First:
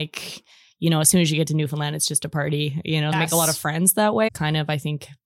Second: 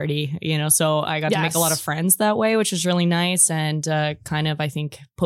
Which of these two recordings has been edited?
first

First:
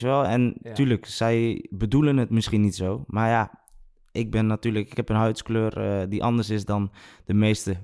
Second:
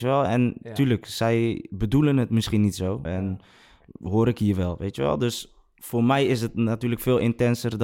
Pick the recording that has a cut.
second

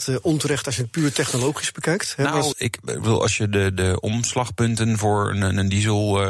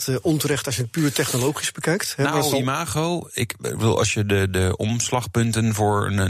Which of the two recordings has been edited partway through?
first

